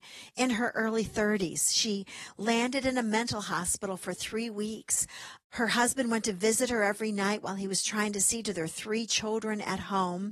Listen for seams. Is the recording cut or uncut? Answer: uncut